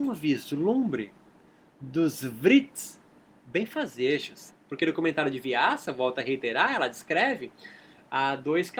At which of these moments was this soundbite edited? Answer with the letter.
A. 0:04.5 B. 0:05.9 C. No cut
A